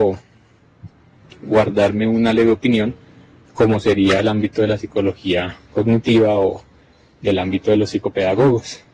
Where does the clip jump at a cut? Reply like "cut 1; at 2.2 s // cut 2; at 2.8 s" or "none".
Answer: cut 1; at 3.5 s